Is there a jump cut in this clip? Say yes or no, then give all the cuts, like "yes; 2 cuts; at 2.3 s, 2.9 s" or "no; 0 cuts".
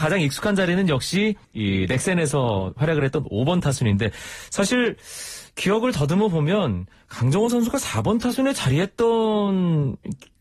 yes; 1 cut; at 1.4 s